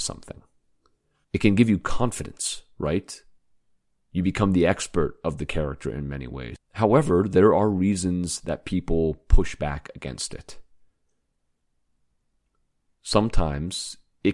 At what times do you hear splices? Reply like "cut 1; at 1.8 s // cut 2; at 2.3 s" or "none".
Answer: cut 1; at 1.2 s // cut 2; at 6.6 s